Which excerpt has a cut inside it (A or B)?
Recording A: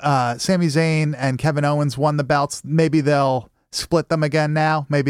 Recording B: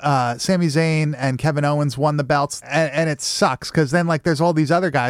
B